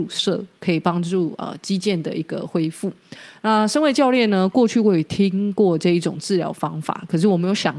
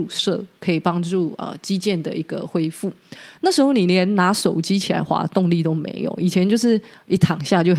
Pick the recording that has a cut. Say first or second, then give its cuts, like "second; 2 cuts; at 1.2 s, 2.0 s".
second; 1 cut; at 3.4 s